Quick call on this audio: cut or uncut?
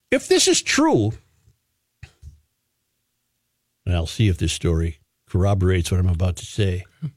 uncut